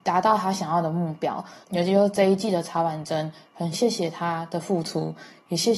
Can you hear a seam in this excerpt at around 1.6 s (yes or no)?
yes